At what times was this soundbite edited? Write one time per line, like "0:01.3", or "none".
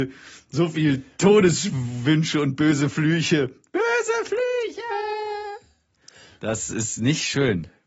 none